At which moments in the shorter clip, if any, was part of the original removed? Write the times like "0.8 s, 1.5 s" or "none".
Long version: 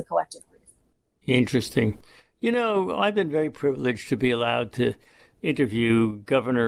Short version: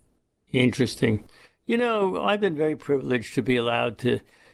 none